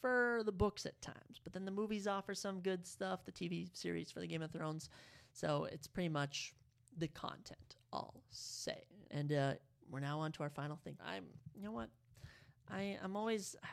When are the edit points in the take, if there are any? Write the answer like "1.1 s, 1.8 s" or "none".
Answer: 9.1 s, 11.0 s